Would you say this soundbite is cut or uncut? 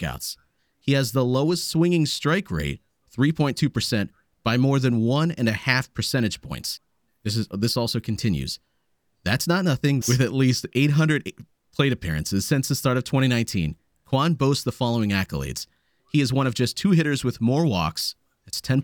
cut